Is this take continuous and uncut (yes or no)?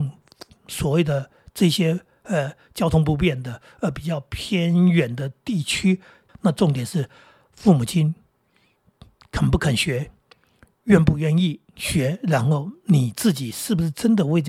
no